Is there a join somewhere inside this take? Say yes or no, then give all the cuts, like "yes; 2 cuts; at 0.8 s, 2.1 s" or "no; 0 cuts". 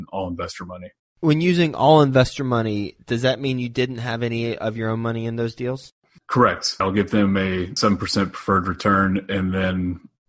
yes; 1 cut; at 1.0 s